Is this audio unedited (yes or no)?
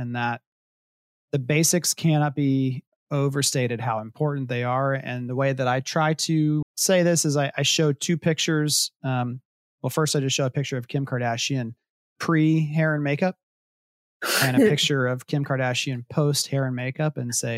no